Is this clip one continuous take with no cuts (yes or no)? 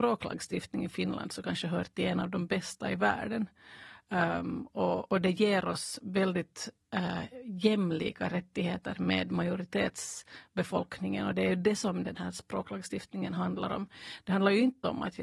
yes